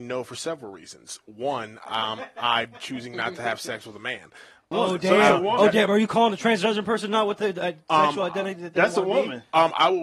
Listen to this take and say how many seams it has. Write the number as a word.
one